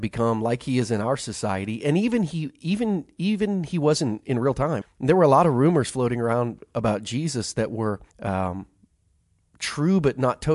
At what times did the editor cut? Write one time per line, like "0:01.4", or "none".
0:04.8
0:08.1